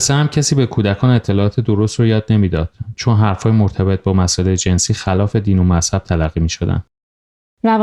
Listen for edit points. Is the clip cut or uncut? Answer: uncut